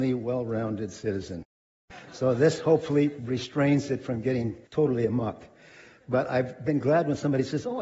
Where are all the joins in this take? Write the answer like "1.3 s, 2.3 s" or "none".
4.7 s